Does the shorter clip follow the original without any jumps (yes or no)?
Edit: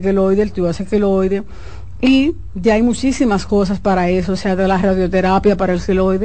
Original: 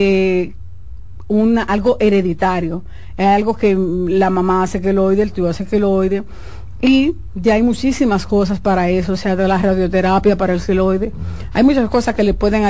yes